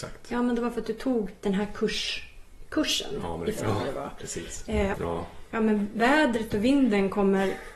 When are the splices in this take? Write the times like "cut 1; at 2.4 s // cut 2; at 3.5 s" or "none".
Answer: cut 1; at 3.6 s // cut 2; at 4.9 s